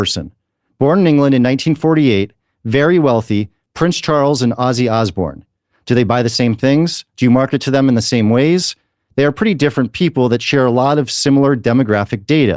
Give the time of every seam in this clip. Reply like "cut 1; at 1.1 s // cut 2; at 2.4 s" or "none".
none